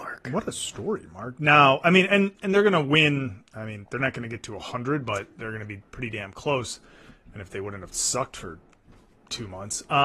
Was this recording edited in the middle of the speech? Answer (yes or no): no